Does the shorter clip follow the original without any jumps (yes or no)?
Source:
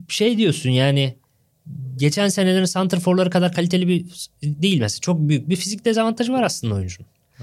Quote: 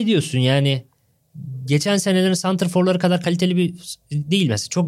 yes